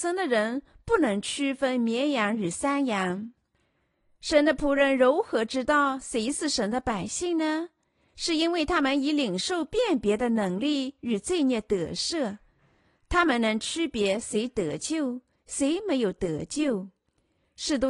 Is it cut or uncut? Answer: uncut